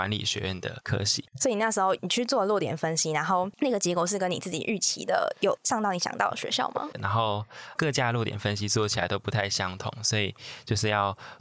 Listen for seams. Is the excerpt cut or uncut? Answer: cut